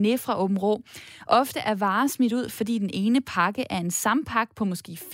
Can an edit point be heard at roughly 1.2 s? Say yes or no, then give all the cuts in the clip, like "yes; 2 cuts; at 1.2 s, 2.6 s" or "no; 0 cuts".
yes; 1 cut; at 1.2 s